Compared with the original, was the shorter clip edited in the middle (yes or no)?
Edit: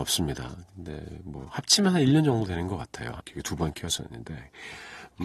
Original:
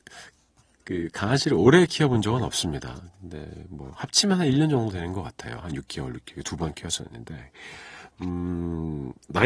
yes